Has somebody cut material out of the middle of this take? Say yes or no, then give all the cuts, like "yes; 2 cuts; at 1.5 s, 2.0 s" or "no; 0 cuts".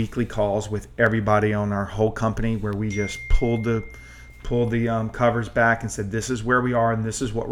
no; 0 cuts